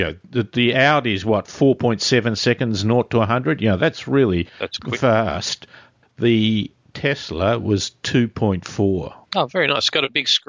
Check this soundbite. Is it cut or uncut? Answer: cut